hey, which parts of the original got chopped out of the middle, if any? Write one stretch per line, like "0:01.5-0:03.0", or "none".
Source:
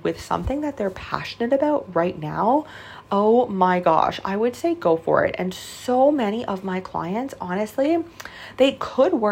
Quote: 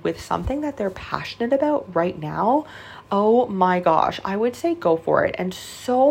none